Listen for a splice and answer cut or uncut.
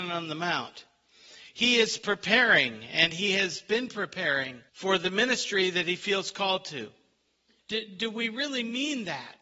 cut